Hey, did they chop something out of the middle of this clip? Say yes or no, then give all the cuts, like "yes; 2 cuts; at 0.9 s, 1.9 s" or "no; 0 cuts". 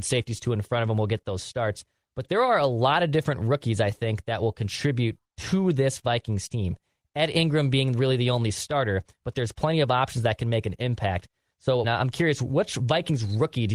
yes; 1 cut; at 11.8 s